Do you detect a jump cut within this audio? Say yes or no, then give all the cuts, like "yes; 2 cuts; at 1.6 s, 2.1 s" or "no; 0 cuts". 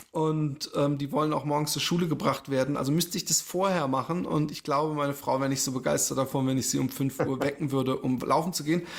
no; 0 cuts